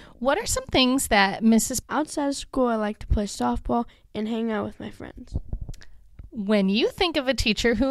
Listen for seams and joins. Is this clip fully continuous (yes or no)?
no